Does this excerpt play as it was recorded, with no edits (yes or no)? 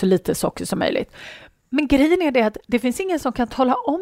yes